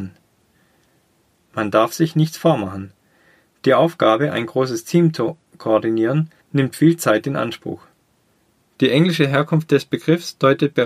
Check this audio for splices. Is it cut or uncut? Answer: cut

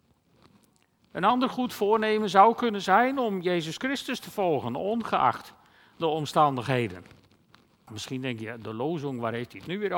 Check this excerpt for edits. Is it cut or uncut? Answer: cut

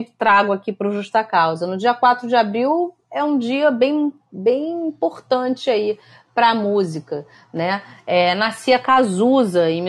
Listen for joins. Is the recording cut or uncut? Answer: uncut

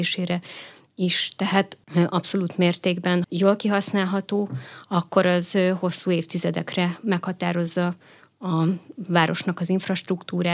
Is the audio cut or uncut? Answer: cut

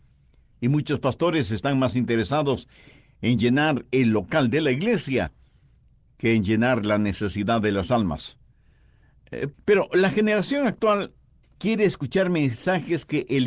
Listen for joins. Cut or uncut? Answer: cut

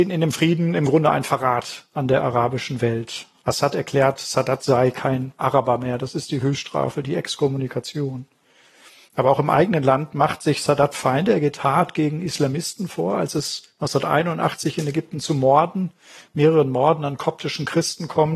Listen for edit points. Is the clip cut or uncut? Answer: uncut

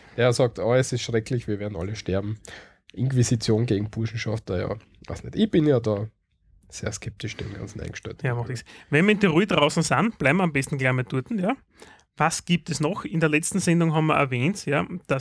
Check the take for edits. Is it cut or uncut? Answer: uncut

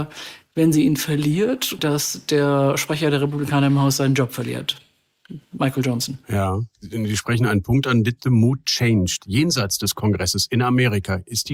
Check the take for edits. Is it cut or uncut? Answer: cut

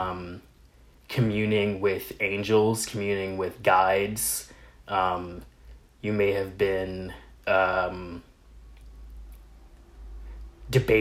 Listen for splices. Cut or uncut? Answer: uncut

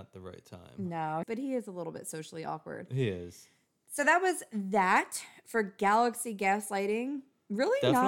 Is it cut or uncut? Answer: cut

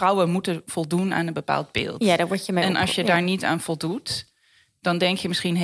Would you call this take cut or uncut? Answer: uncut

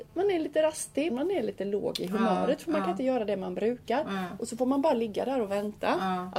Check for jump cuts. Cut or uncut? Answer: cut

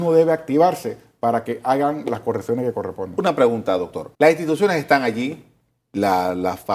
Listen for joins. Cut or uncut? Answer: cut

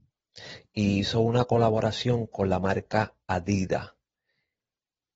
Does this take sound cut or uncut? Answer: uncut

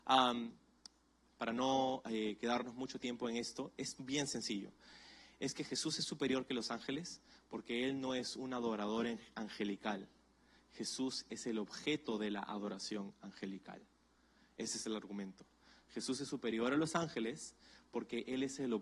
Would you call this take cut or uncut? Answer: cut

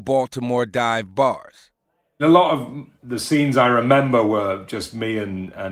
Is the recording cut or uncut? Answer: uncut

